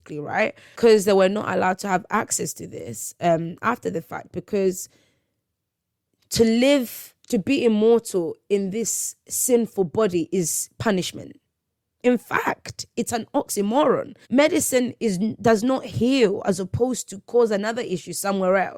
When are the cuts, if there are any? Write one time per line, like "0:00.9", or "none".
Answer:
0:07.3
0:12.0
0:14.2